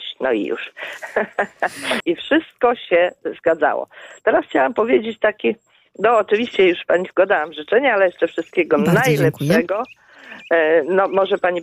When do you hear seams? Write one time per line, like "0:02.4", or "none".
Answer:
0:02.0